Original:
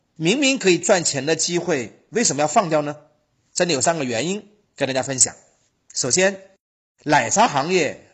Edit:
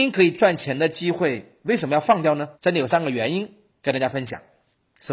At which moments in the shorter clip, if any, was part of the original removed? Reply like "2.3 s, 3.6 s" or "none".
2.5 s